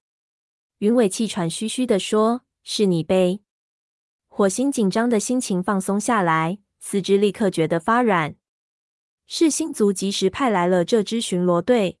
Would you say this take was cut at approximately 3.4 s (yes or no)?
yes